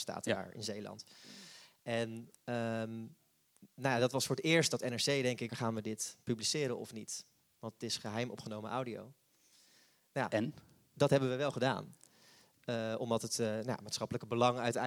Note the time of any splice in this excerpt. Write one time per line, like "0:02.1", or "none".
0:05.5